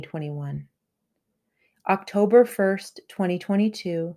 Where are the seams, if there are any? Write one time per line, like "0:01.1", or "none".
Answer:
none